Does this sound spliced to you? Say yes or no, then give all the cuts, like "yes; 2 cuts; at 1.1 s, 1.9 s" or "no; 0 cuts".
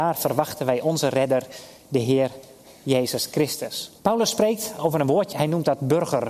yes; 2 cuts; at 4.0 s, 5.3 s